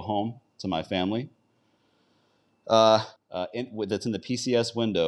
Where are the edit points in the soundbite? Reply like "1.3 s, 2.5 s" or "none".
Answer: 3.2 s